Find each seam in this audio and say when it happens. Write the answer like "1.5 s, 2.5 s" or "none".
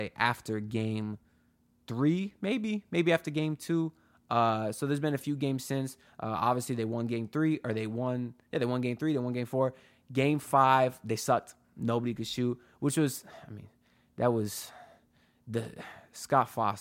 none